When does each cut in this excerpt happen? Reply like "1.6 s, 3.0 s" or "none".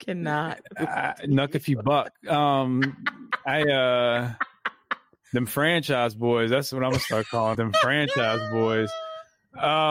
7.5 s